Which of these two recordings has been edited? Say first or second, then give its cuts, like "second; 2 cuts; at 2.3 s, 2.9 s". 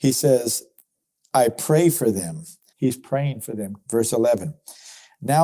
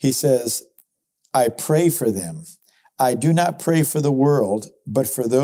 first; 2 cuts; at 2.7 s, 3.9 s